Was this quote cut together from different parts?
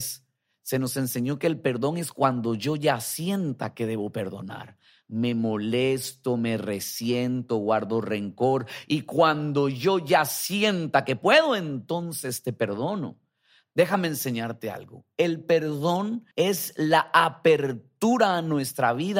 yes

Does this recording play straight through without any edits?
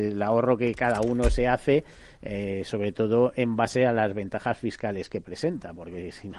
yes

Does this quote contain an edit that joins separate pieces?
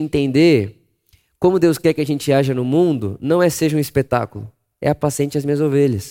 no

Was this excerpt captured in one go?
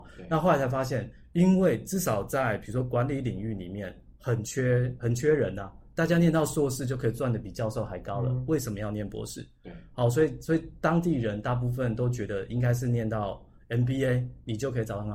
yes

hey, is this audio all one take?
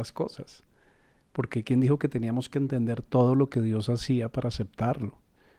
yes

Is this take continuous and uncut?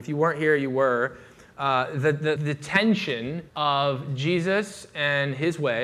no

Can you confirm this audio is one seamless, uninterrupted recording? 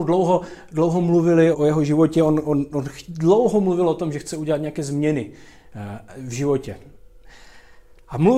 no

